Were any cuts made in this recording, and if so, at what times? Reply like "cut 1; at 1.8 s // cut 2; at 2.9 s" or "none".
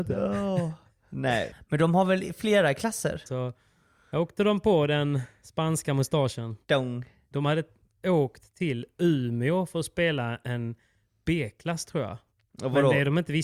cut 1; at 1.5 s // cut 2; at 3.3 s // cut 3; at 7.3 s